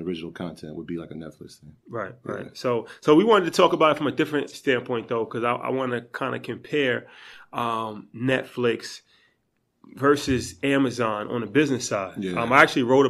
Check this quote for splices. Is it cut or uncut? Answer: uncut